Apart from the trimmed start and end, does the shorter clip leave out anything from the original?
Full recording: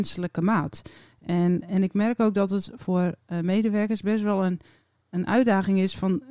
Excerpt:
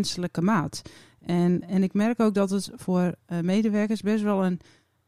no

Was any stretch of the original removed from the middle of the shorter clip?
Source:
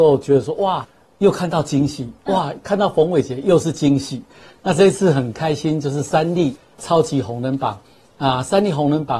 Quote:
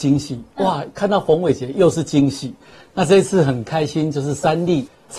no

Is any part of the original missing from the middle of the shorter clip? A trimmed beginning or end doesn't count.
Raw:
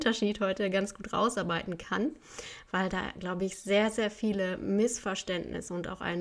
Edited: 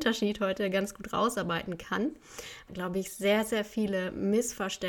yes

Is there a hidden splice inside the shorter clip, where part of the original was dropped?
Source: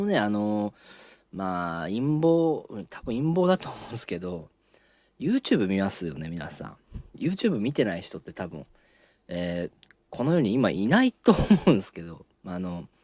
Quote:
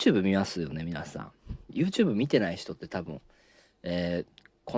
no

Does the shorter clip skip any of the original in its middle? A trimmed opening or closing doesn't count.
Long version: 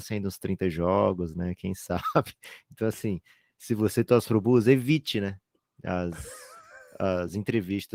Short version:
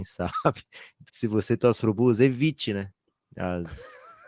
yes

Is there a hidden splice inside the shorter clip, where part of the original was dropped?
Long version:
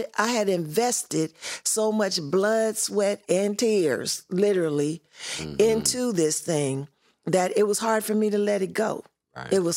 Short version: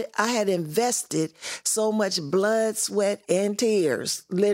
no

